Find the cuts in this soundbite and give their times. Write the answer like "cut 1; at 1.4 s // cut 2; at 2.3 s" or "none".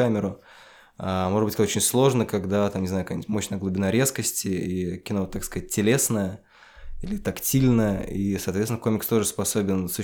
cut 1; at 1.6 s